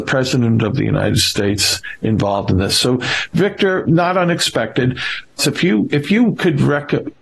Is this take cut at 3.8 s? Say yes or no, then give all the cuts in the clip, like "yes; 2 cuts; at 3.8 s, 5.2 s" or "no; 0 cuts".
yes; 2 cuts; at 3.8 s, 5.4 s